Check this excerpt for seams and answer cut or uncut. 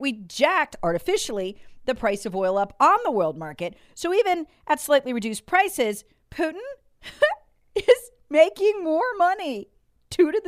uncut